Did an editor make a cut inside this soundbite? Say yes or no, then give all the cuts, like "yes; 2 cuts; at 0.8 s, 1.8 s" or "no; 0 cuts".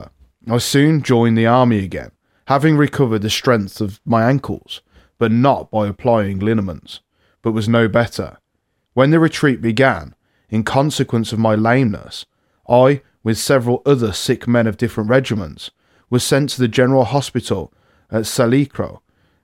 yes; 2 cuts; at 7.3 s, 8.8 s